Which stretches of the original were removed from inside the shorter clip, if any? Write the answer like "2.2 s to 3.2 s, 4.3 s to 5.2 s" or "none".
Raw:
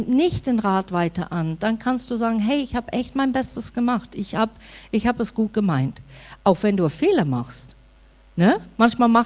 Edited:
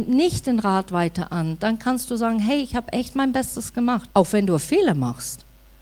4.1 s to 6.4 s